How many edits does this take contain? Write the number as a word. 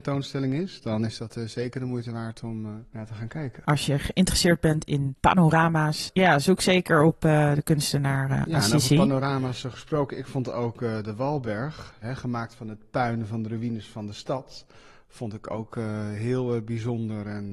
zero